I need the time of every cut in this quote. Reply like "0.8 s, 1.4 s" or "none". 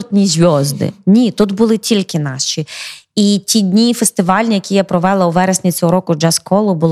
none